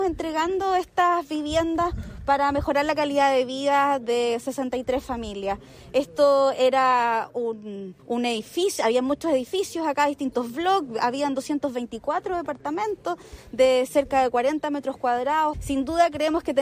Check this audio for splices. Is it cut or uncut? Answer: cut